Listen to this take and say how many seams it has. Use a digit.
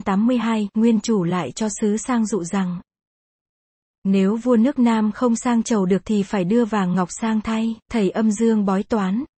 1